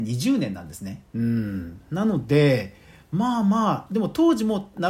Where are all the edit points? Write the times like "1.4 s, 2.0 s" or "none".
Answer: 1.1 s

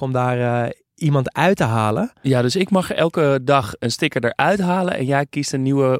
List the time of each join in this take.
3.8 s

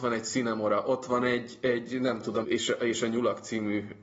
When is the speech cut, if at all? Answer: 2.4 s

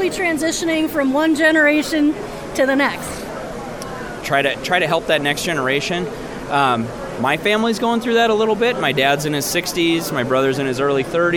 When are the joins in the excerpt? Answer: 4.2 s

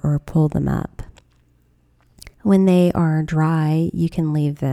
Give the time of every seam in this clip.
2.3 s

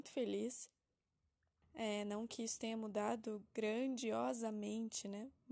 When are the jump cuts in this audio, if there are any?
1.6 s

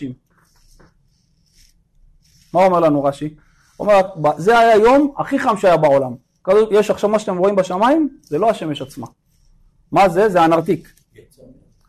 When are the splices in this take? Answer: none

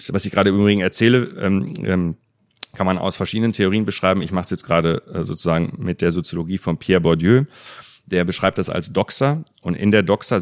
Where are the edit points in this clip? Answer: none

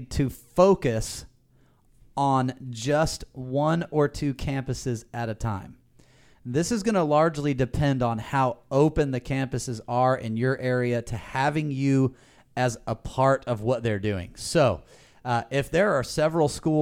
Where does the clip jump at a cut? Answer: none

